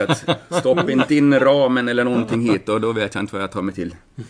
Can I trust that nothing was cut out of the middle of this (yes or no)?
yes